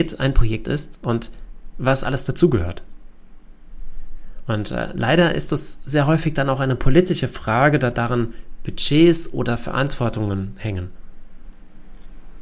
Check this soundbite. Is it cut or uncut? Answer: cut